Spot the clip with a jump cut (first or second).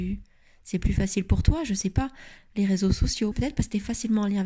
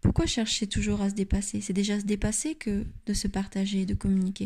first